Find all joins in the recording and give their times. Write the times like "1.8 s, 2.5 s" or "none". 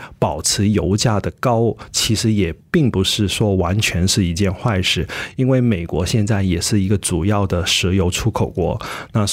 none